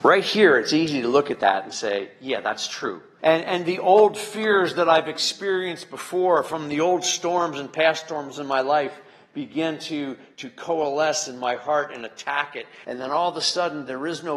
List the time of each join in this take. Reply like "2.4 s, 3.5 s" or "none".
3.2 s, 12.8 s